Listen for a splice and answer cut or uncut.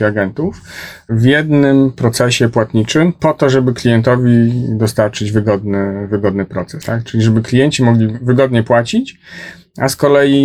uncut